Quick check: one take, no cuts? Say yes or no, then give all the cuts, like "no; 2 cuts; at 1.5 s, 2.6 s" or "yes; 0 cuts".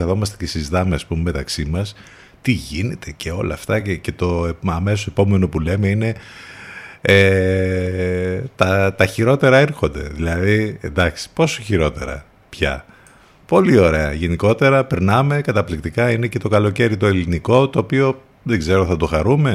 yes; 0 cuts